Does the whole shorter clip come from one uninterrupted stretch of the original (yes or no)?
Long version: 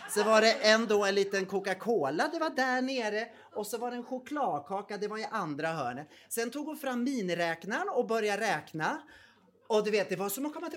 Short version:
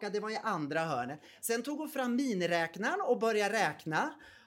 yes